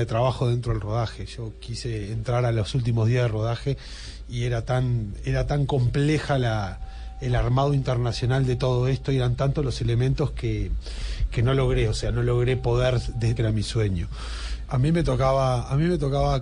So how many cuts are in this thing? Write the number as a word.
two